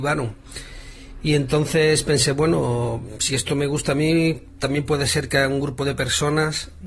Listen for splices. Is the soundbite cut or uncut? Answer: uncut